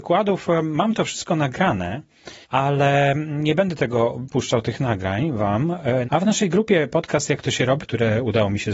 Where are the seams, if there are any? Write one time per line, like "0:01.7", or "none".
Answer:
0:02.4
0:06.0
0:07.8

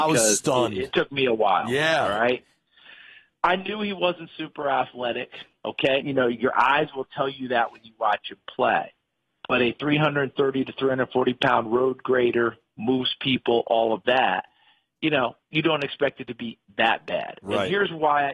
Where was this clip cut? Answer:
0:06.0

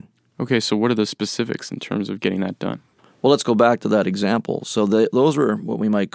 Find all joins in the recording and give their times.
none

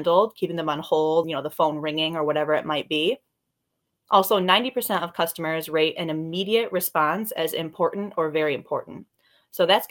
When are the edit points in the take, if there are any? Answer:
0:01.2
0:03.9

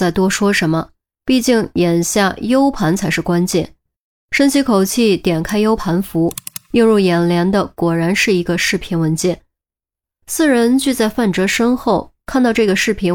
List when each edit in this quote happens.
0:05.8

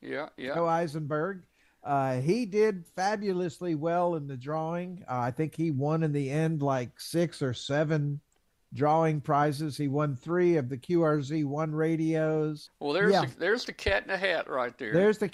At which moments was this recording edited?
0:12.7

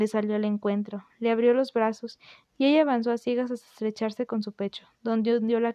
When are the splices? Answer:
none

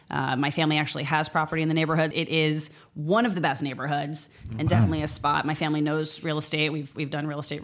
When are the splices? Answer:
0:02.1

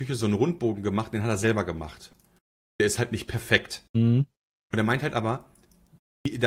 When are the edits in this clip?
0:03.9

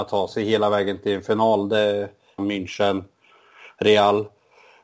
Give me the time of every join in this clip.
0:02.4

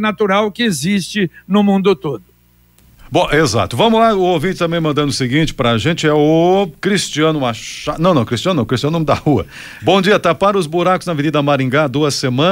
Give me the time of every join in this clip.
0:09.8

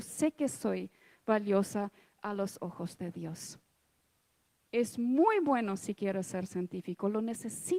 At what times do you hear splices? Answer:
0:04.6

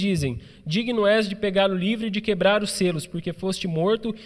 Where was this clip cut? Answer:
none

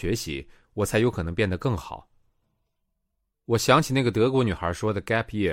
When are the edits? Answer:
0:03.3

